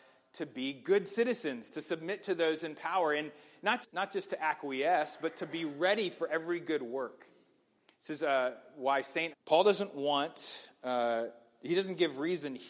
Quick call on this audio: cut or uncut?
cut